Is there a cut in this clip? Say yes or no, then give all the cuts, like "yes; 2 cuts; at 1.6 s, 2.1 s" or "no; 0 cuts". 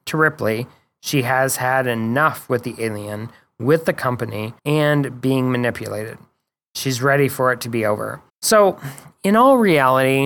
yes; 2 cuts; at 4.6 s, 8.3 s